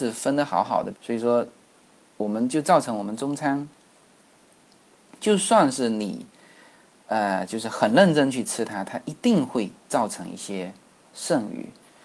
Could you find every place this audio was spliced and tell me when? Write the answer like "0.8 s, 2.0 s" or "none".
0.9 s